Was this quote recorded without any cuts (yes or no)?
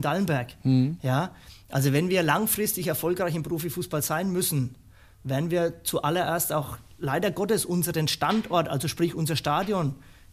yes